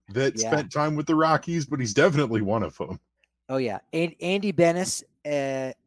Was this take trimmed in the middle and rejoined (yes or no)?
no